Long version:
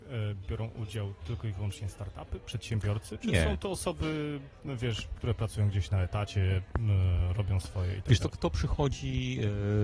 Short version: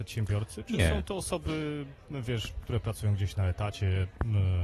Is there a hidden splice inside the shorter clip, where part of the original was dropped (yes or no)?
no